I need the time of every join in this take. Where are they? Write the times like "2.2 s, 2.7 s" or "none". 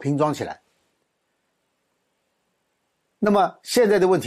none